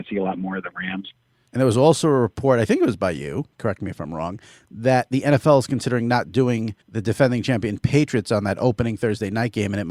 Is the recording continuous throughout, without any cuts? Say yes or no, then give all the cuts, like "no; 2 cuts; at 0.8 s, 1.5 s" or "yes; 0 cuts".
no; 2 cuts; at 1.5 s, 6.8 s